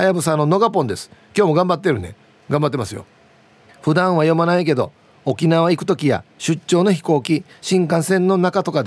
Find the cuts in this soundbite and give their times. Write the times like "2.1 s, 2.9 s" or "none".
3.7 s